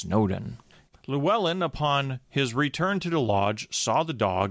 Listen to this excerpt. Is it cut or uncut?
cut